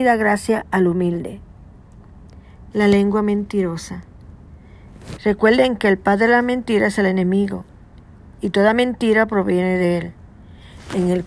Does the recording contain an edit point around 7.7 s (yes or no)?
no